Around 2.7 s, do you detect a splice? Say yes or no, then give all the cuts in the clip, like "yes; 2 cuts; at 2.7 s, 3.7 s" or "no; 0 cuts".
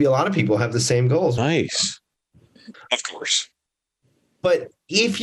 yes; 2 cuts; at 1.4 s, 2.7 s